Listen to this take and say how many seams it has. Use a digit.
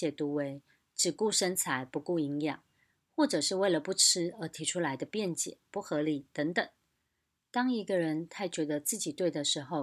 1